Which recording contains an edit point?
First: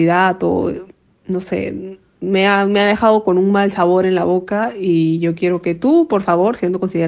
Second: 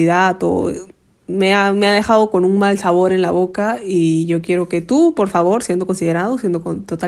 second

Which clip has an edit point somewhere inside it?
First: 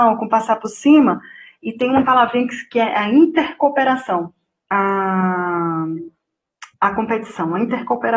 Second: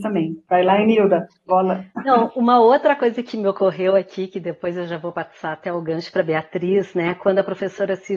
first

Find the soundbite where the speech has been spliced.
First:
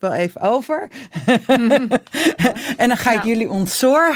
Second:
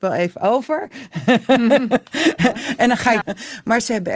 second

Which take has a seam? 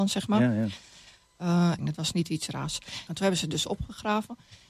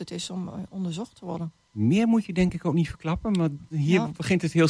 first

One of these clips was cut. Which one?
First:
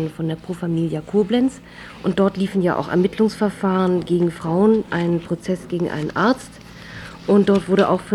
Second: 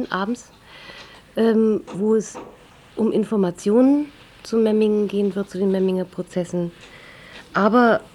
first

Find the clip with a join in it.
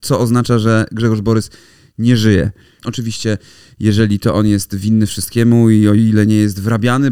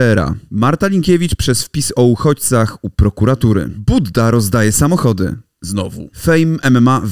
first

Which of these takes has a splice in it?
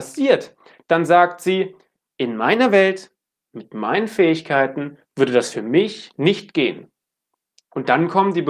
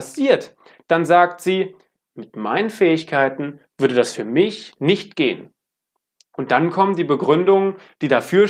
second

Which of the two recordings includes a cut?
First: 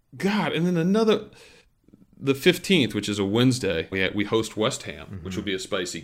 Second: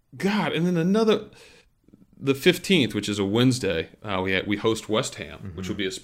first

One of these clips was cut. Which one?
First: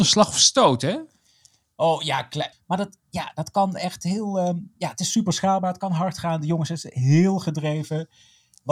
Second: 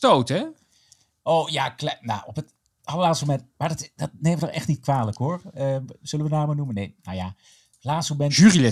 first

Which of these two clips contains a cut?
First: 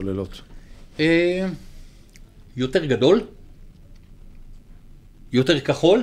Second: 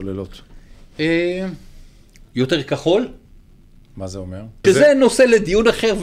second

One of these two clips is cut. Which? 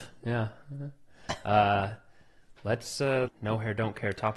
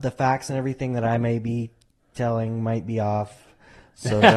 first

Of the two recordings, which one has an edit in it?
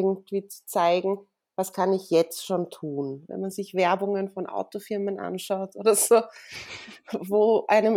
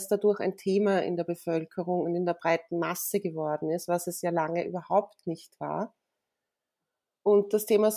first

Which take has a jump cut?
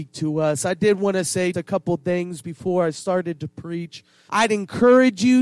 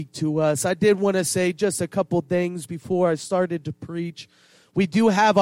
first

